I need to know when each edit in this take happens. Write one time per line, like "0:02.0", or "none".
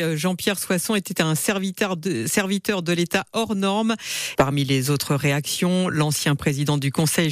0:04.4

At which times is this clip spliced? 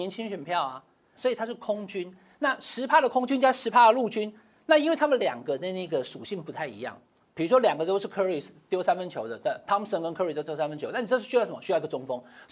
0:01.1

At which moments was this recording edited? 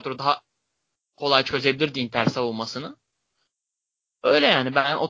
none

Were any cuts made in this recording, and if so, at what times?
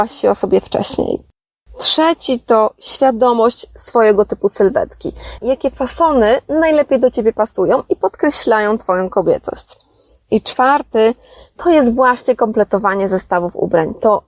0:05.4

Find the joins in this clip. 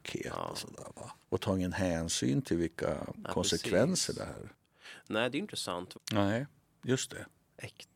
0:01.2
0:05.9

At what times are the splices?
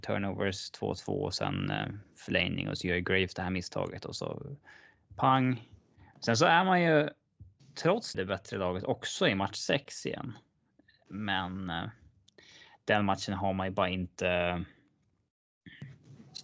0:08.1

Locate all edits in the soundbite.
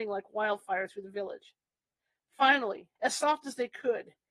0:03.0

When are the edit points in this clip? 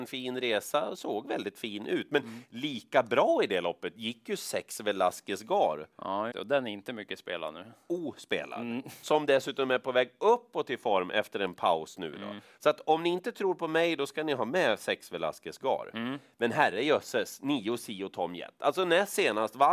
0:06.3

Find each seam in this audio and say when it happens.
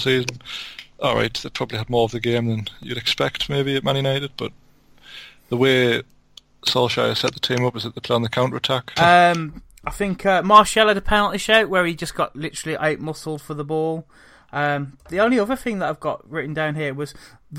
0:09.0

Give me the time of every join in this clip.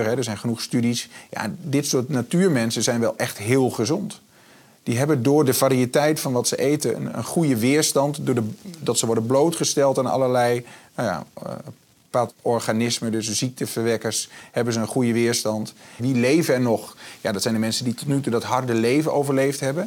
0:12.3
0:16.0

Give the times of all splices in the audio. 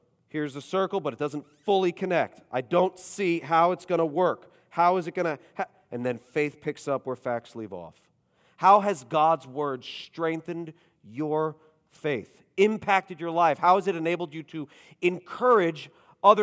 none

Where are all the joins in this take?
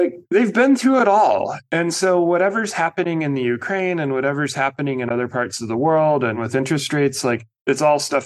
none

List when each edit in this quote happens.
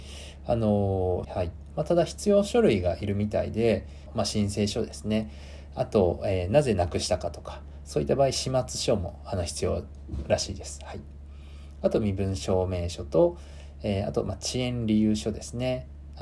0:01.2
0:04.1

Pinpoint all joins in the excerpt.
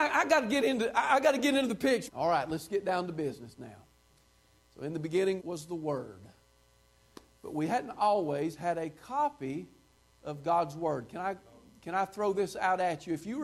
0:02.1
0:05.4

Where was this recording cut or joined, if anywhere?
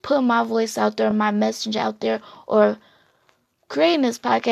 none

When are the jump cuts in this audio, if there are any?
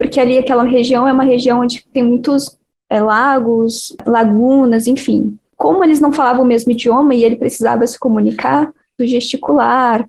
0:05.5
0:09.0

